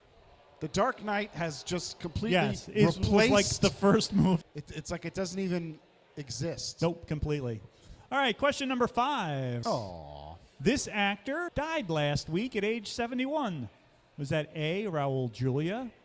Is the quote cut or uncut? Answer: cut